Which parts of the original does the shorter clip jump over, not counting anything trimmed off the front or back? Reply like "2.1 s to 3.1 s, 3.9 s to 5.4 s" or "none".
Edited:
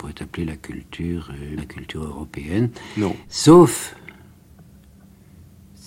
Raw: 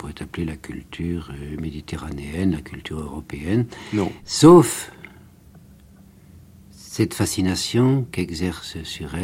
1.6 s to 2.5 s